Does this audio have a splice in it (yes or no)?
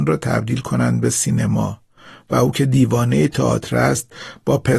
no